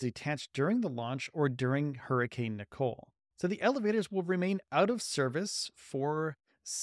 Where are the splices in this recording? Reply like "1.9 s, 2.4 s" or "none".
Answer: 3.3 s